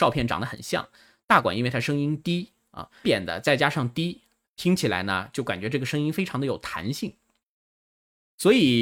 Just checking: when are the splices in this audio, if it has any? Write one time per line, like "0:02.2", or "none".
0:03.0